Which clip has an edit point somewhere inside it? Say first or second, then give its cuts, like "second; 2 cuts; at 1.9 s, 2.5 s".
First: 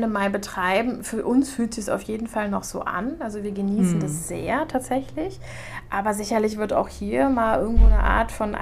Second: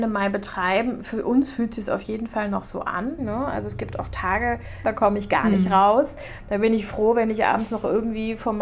second; 2 cuts; at 3.2 s, 4.8 s